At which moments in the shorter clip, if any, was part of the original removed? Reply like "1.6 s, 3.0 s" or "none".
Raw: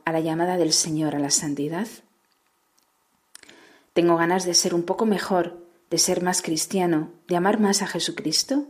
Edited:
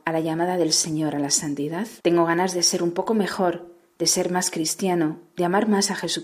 2.0 s